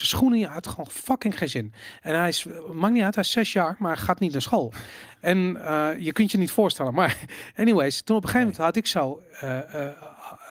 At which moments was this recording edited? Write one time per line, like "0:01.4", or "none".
none